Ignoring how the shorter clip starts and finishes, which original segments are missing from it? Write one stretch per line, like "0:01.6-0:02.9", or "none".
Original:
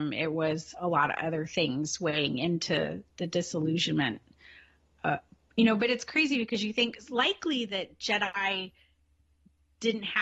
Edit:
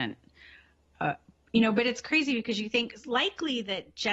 none